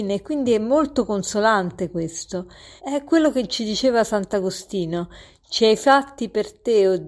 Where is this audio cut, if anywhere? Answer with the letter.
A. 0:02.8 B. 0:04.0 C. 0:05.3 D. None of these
A